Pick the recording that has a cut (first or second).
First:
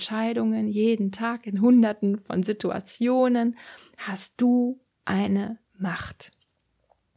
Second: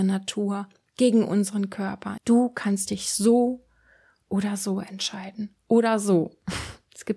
second